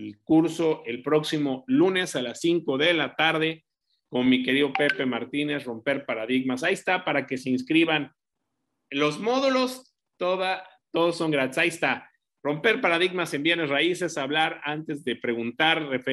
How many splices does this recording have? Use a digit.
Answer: 0